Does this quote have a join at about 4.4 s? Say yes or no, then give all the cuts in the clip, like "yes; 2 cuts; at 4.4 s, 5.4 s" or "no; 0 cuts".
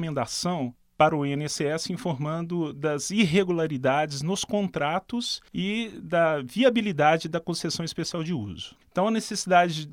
no; 1 cut; at 8.8 s